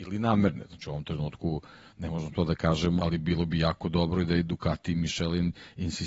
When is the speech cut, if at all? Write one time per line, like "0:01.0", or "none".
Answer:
0:03.0